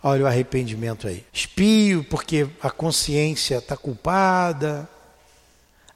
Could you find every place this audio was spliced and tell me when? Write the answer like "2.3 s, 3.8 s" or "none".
1.3 s